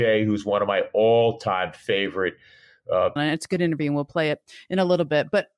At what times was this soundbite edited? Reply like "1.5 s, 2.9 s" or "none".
3.2 s